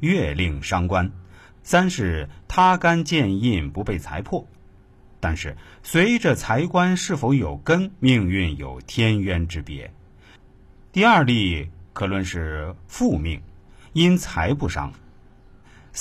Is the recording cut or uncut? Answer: cut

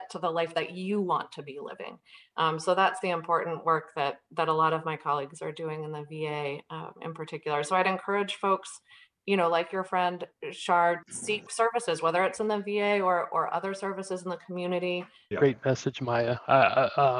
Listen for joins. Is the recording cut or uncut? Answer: cut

